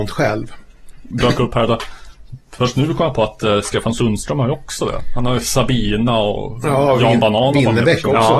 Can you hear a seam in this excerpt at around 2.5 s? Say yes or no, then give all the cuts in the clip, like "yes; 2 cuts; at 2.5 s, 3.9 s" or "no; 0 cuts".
no; 1 cut; at 1.1 s